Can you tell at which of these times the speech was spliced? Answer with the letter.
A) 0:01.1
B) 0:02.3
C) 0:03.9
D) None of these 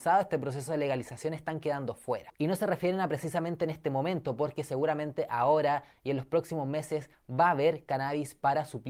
B